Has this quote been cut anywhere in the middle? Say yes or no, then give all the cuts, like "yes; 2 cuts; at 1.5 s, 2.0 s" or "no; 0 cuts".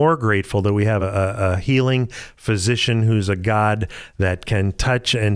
no; 0 cuts